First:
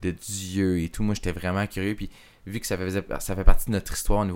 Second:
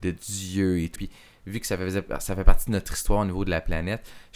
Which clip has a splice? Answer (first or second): second